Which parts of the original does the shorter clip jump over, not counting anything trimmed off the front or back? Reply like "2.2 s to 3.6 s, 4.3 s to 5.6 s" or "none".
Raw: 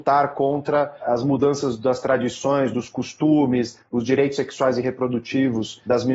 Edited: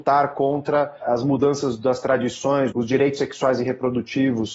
2.7 s to 3.9 s